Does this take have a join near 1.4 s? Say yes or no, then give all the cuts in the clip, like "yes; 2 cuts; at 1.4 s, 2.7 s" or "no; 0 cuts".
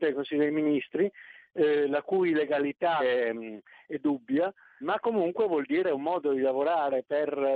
no; 2 cuts; at 3.0 s, 4.8 s